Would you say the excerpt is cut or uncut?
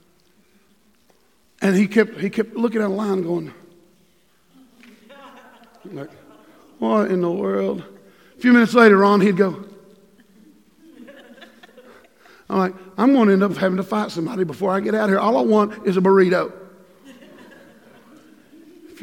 uncut